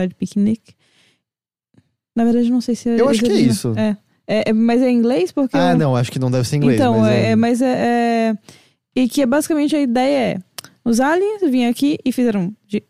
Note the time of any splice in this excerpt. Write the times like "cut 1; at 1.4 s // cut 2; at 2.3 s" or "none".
none